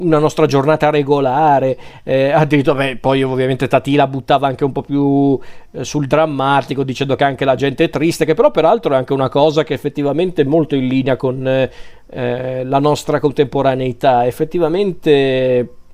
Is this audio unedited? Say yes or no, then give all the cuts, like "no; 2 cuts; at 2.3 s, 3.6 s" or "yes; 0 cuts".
yes; 0 cuts